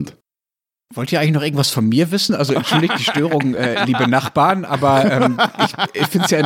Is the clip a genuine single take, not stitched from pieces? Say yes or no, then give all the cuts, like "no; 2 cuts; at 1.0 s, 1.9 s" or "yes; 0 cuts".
yes; 0 cuts